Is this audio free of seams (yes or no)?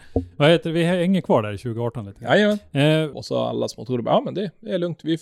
no